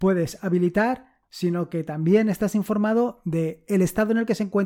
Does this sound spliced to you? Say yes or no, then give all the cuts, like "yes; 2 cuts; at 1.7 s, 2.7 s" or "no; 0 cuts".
yes; 1 cut; at 1.2 s